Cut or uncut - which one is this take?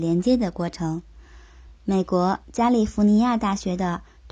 uncut